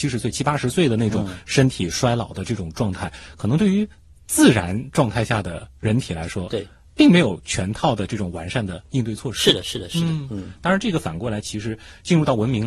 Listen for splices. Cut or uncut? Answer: uncut